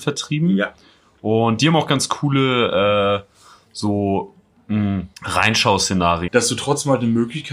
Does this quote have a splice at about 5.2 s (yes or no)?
yes